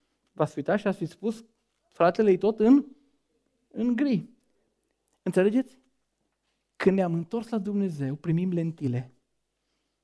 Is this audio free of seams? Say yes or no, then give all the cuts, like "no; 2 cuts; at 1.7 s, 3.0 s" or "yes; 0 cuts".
yes; 0 cuts